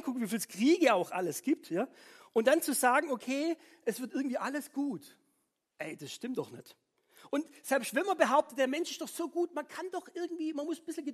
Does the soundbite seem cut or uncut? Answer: uncut